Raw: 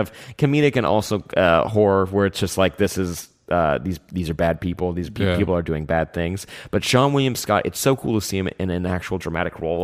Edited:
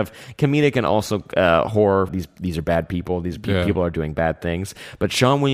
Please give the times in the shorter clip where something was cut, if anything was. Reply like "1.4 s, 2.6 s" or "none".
2.1 s